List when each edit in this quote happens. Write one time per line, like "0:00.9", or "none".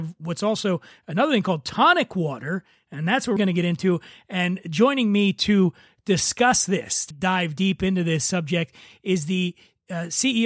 0:03.4
0:07.1

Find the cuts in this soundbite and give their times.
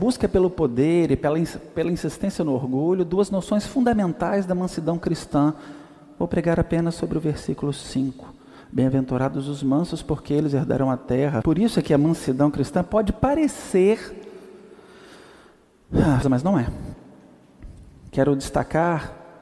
0:11.4
0:16.2

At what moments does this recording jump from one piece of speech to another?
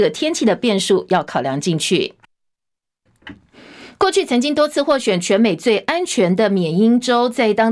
none

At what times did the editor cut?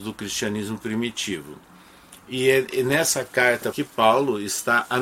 0:03.7

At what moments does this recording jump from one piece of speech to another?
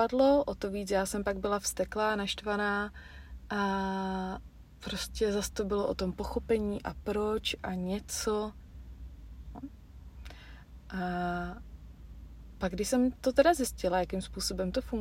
0:09.5

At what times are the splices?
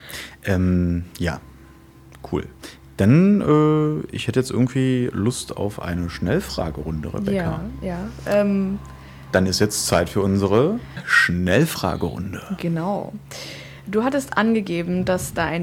none

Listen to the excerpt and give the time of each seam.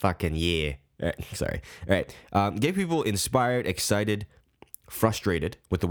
none

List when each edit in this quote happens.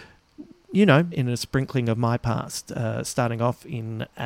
0:01.1

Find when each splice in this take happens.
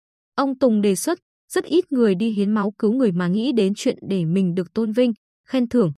none

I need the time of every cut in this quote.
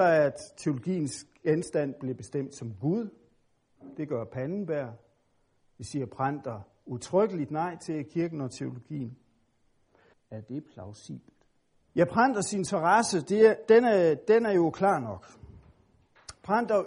0:10.1
0:11.8

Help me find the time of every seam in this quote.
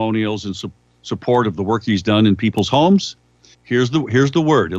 0:03.5

